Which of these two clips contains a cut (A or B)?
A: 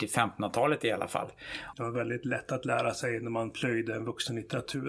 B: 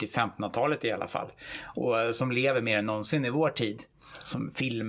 A